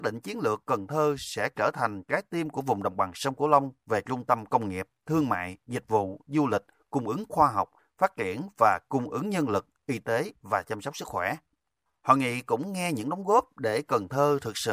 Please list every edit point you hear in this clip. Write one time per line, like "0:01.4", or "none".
none